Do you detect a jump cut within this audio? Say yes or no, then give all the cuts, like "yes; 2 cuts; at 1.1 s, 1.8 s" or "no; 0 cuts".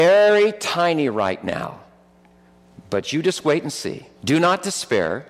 yes; 1 cut; at 4.1 s